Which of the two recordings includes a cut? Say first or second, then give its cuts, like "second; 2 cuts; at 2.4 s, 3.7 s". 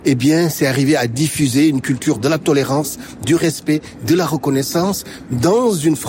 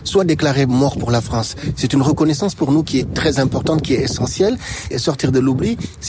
second; 1 cut; at 4.9 s